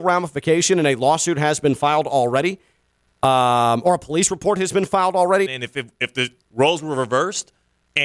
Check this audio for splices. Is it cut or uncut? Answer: cut